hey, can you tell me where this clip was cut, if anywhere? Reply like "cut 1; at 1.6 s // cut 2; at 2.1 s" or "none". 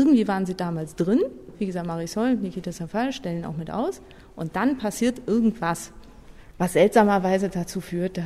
none